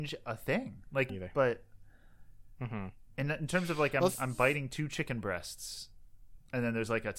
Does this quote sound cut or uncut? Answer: cut